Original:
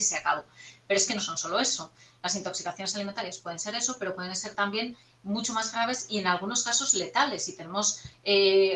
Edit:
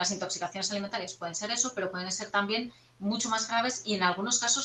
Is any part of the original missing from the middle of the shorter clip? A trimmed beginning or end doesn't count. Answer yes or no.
no